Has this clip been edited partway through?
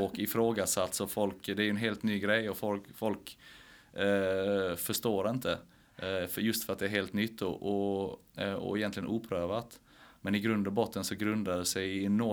no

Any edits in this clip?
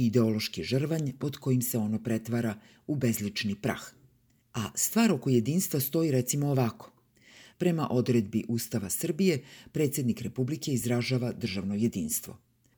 no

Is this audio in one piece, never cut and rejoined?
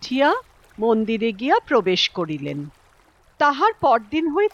yes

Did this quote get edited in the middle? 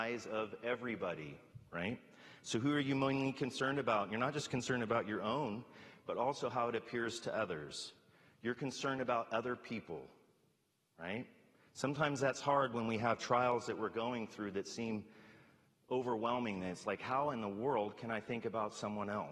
no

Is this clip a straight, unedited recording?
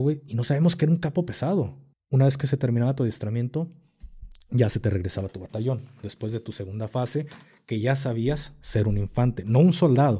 no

